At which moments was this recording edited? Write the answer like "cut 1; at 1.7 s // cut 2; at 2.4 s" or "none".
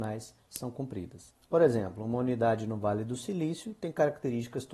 cut 1; at 1.4 s